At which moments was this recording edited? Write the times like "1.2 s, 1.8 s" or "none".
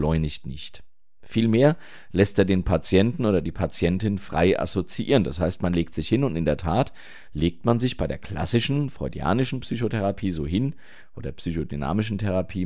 none